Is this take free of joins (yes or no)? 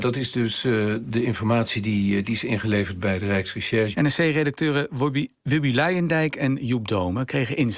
no